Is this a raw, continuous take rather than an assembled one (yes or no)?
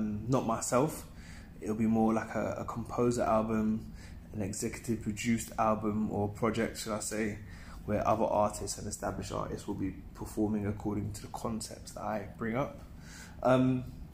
yes